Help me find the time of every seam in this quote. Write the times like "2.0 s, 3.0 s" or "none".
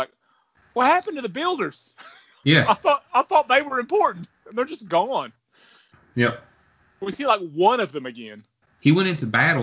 8.6 s